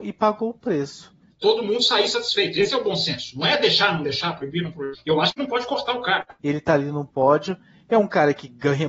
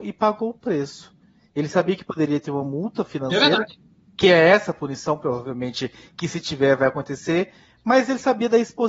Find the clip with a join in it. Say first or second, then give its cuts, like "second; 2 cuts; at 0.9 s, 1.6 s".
first; 2 cuts; at 1.3 s, 6.4 s